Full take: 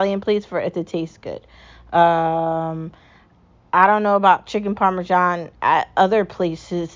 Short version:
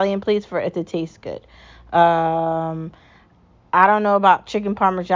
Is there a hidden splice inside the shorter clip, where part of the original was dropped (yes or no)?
no